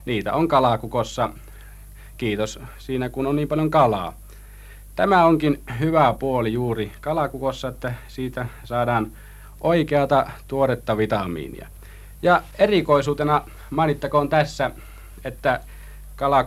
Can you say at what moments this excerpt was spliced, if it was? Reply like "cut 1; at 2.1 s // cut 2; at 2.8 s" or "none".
none

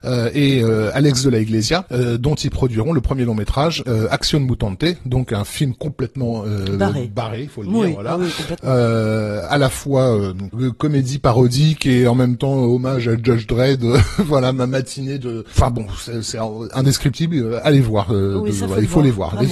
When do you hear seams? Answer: cut 1; at 3.8 s

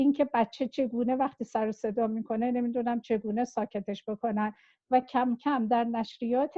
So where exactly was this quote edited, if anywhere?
none

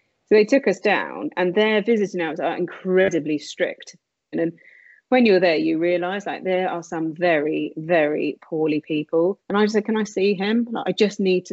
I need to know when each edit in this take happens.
cut 1; at 4.3 s // cut 2; at 9.4 s

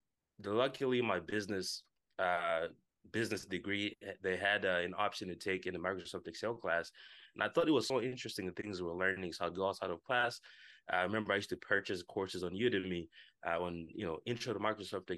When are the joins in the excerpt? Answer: none

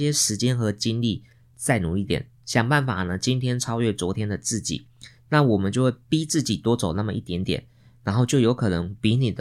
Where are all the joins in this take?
cut 1; at 1.5 s

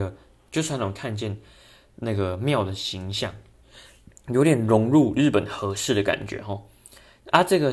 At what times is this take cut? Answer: cut 1; at 4.1 s

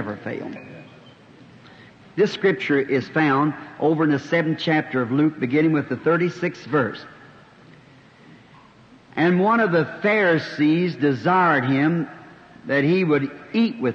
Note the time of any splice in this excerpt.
none

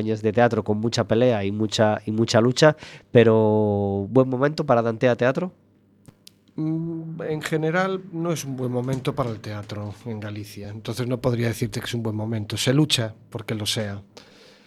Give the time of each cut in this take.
none

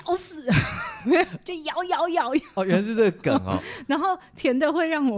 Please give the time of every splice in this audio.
none

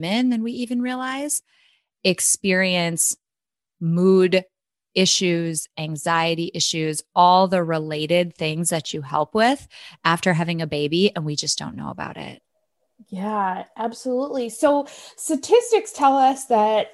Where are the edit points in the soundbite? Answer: none

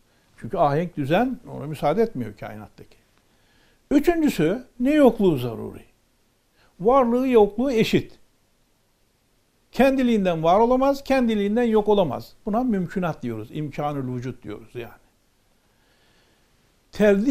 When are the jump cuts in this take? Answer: cut 1; at 4.8 s

